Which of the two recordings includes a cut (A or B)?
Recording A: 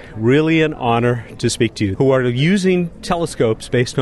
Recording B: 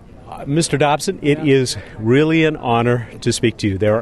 A